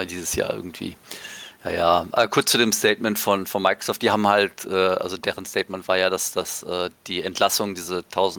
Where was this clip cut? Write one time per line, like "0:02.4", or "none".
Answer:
none